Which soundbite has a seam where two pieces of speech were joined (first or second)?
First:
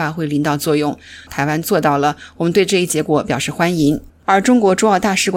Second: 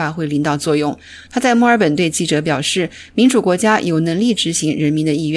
first